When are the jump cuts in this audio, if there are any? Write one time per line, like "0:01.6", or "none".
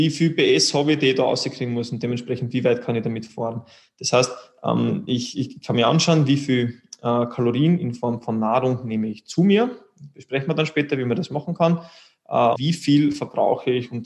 0:12.5